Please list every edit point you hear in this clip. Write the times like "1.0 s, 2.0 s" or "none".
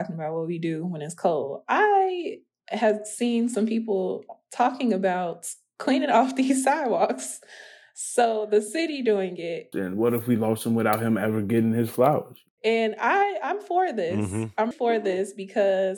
9.7 s, 12.6 s, 14.7 s